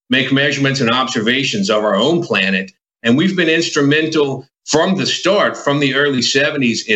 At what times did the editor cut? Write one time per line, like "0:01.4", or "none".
none